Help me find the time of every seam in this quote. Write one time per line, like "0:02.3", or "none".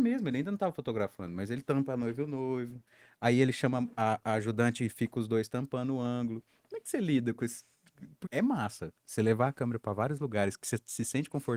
0:08.3